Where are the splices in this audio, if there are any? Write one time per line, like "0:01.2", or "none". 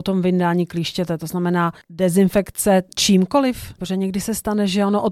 0:01.8
0:03.8

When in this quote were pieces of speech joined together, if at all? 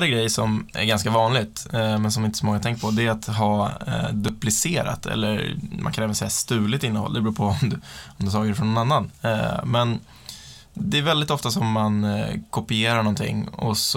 none

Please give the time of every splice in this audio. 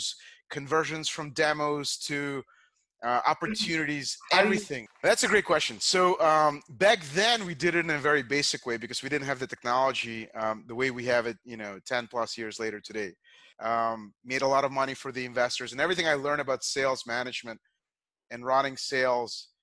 0:04.9
0:13.5

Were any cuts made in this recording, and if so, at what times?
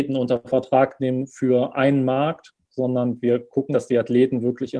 0:03.7

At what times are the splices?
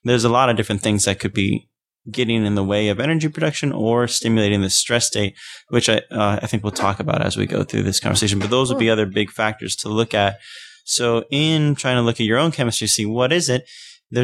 none

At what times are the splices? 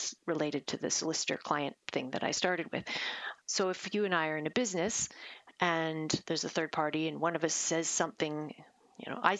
0:03.4

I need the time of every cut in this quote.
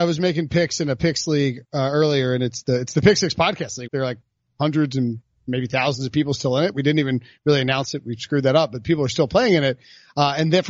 0:03.9

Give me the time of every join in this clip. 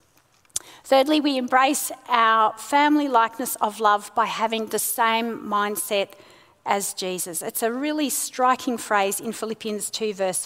none

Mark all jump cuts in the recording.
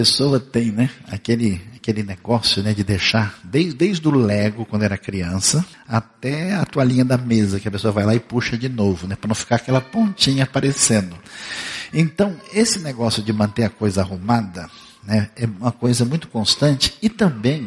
0:05.7

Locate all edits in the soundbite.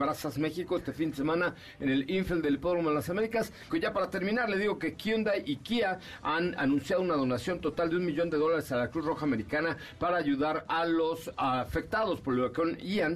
0:03.7

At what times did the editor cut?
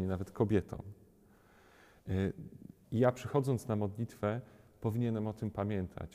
0:02.8

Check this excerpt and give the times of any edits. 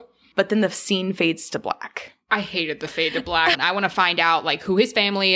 0:03.5

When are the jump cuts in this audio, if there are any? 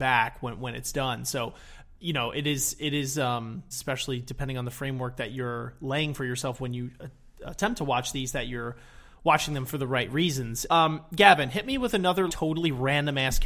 0:03.7
0:10.7
0:12.3

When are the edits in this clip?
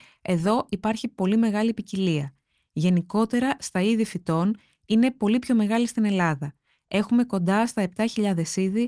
0:03.6

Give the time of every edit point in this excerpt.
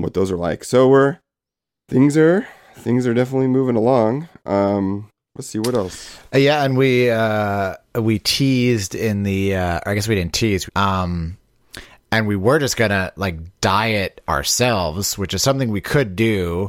0:10.7

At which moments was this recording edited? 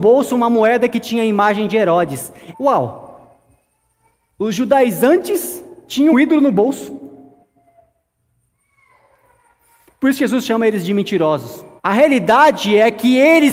0:02.5
0:06.1
0:11.8

